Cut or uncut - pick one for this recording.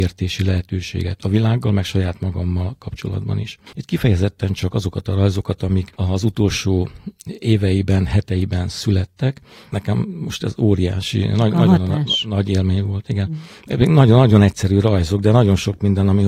cut